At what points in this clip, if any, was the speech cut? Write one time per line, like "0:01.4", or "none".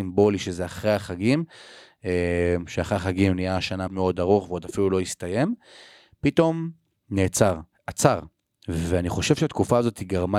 0:03.9
0:07.7